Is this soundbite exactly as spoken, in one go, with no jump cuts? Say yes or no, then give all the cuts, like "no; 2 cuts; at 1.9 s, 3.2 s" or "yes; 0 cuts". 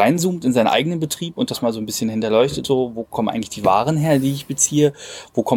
yes; 0 cuts